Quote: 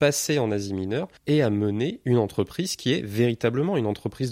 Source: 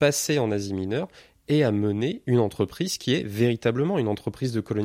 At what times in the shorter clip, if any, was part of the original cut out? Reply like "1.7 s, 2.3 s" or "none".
1.2 s